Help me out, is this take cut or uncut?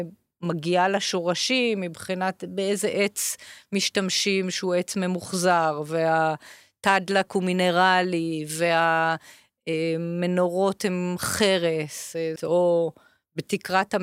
cut